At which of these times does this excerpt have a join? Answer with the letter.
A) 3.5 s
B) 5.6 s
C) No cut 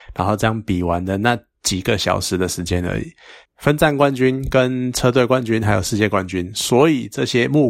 A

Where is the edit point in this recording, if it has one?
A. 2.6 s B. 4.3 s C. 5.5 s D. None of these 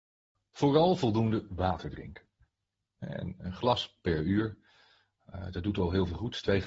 D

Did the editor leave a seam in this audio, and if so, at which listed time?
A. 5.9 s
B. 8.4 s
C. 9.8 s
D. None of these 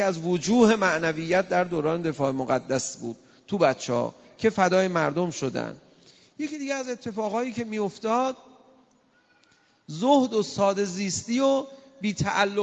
D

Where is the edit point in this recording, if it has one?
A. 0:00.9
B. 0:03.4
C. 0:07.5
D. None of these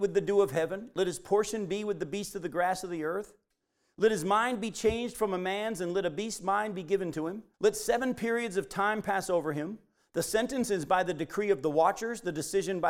C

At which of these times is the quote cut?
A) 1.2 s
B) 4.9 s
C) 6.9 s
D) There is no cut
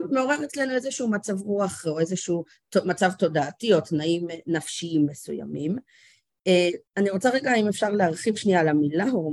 C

